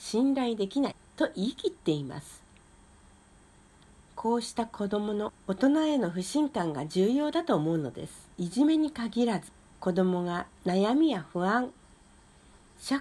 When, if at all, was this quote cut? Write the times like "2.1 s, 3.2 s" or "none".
8.3 s, 10.5 s

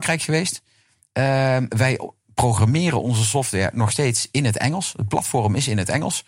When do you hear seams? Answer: none

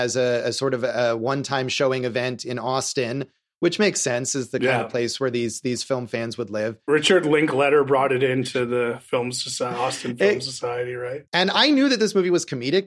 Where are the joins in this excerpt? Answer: 11.2 s

